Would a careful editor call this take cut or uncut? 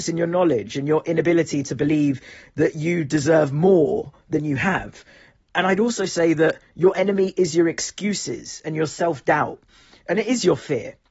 uncut